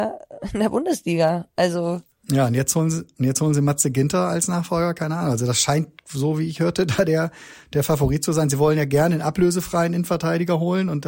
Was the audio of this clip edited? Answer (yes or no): no